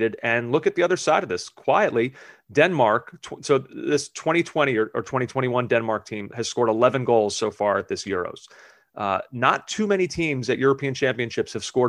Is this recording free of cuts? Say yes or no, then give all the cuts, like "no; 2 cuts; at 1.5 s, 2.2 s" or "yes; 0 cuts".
yes; 0 cuts